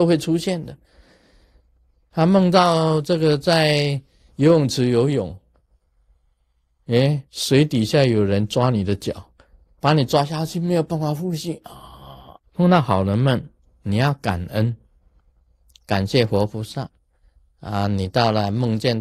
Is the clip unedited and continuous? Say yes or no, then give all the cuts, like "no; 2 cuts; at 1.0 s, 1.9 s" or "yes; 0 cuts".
no; 1 cut; at 12.4 s